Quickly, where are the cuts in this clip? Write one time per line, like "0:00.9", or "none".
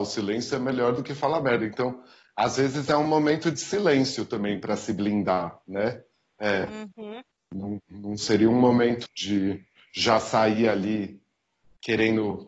0:09.1